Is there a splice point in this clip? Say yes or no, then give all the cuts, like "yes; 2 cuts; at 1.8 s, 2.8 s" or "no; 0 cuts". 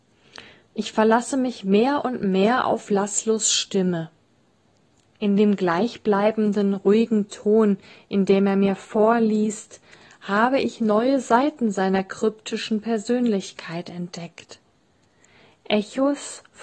no; 0 cuts